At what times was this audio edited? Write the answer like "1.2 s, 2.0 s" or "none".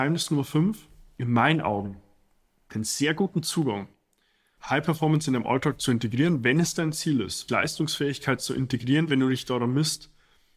7.5 s